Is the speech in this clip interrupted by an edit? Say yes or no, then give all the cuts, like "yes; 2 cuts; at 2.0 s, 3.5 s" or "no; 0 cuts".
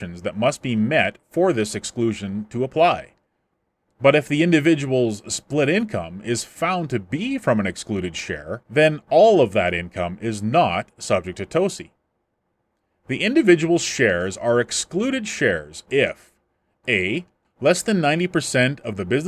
no; 0 cuts